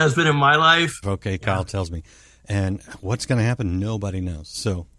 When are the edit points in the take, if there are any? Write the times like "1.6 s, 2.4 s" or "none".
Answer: 1.0 s